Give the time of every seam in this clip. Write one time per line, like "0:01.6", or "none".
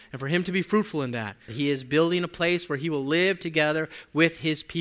0:01.5